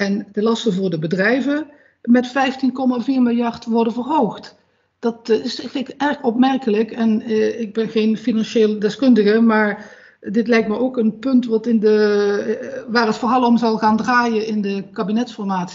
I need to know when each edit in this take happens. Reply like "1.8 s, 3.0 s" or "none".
none